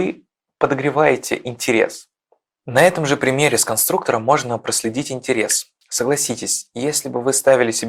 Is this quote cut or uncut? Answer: uncut